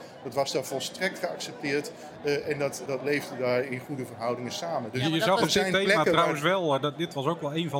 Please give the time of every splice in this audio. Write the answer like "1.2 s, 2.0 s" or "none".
2.9 s